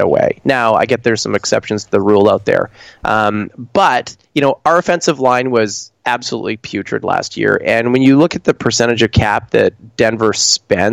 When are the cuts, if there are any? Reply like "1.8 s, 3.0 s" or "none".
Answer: 4.2 s